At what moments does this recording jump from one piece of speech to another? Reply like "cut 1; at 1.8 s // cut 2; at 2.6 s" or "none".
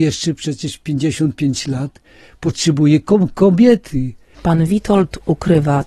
cut 1; at 4.3 s

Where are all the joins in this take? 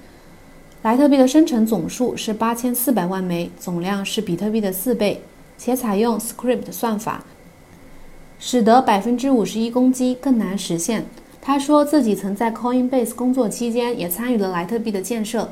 cut 1; at 11.4 s

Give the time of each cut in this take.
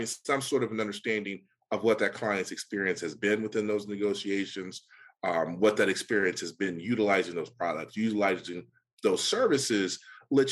none

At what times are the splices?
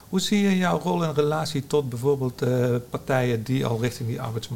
none

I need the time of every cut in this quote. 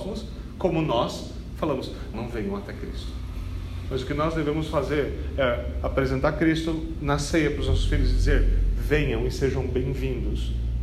cut 1; at 2.1 s

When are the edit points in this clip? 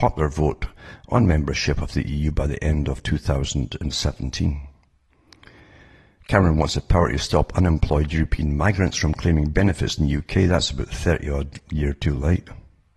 none

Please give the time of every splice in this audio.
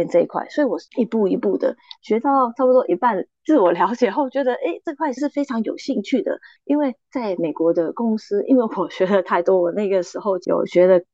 cut 1; at 6.6 s

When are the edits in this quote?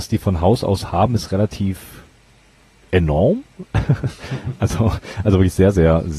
none

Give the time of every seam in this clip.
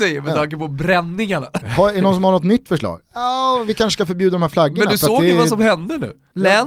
cut 1; at 1.6 s

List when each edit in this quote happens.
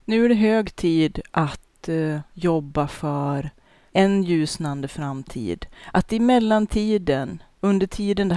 none

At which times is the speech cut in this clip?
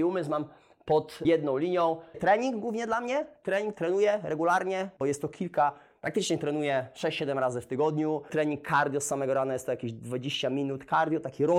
cut 1; at 2.1 s

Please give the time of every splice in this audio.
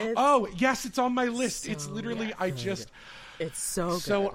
none

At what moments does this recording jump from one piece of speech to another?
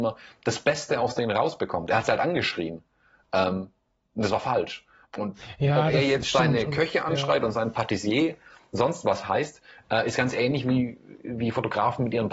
cut 1; at 5.0 s

